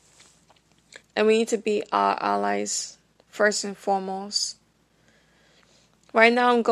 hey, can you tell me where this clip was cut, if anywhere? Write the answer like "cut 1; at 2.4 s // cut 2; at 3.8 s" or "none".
cut 1; at 1.0 s